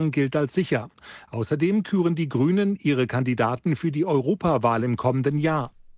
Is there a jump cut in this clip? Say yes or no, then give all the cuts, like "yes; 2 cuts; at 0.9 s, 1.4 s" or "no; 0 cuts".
no; 0 cuts